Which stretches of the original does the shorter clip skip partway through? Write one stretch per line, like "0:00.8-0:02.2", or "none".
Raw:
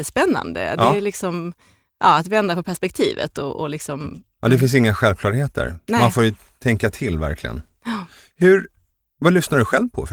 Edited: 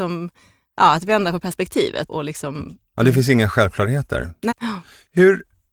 0:03.3-0:03.5
0:05.9-0:07.7